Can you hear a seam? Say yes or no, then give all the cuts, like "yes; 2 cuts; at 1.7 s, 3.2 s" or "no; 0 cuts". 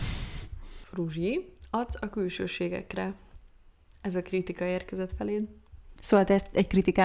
no; 0 cuts